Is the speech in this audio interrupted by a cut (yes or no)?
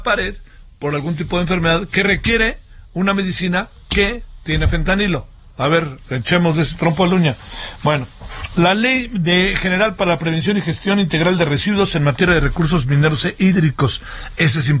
no